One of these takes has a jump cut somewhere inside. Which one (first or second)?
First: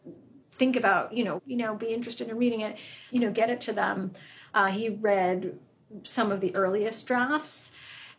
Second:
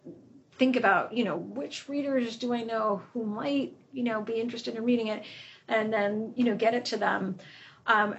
first